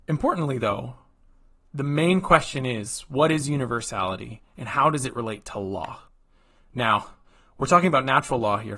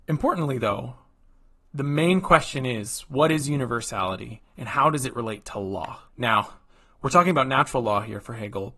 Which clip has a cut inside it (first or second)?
second